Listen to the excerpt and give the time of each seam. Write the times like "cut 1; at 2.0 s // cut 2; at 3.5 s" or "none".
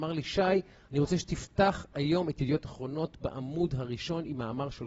none